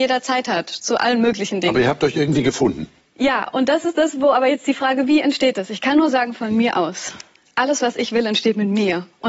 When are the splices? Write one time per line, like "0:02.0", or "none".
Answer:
none